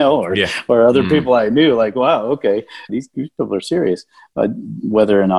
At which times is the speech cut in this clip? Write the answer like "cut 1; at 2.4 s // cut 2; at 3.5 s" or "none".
cut 1; at 2.9 s